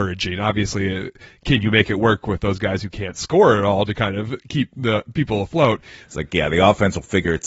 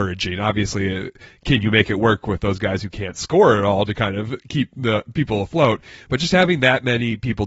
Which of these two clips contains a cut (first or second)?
first